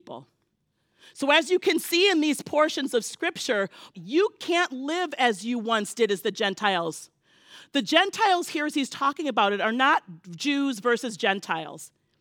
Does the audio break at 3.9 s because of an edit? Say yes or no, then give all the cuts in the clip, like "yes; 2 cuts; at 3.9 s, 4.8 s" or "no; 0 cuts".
yes; 1 cut; at 3.9 s